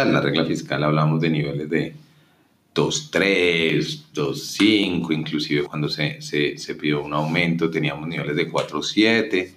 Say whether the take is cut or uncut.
cut